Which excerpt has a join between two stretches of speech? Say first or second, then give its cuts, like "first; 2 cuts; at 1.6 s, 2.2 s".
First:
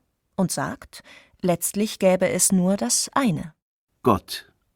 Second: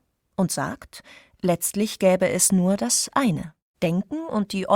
second; 1 cut; at 3.7 s